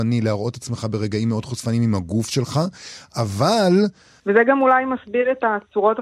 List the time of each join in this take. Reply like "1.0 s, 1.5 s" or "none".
4.2 s